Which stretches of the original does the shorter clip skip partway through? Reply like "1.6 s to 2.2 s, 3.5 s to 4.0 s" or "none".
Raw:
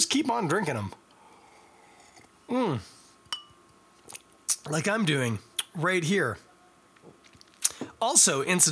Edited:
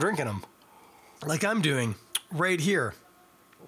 1.6 s to 4.6 s